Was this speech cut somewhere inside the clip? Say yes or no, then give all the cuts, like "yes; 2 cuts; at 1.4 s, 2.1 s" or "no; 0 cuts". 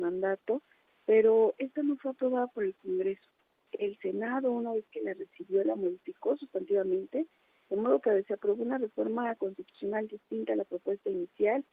no; 0 cuts